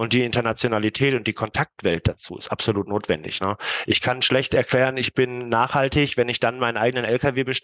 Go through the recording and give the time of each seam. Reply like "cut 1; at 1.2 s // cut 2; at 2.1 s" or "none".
none